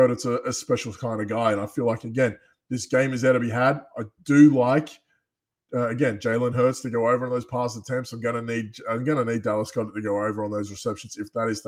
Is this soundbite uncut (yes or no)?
yes